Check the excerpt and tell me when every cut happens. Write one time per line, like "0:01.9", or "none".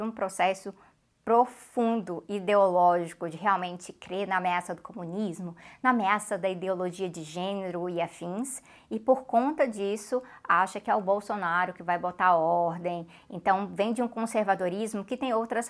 none